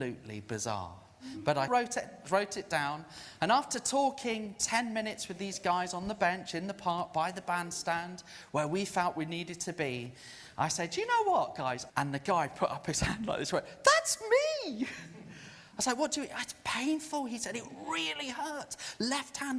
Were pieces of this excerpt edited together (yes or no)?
yes